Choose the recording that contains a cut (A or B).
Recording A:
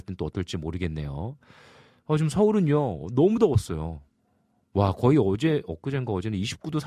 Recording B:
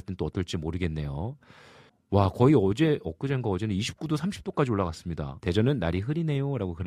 B